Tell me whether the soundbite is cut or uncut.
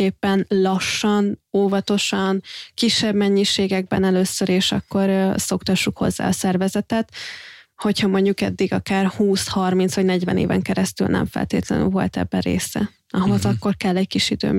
uncut